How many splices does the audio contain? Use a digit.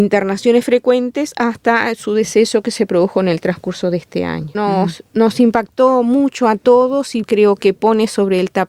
2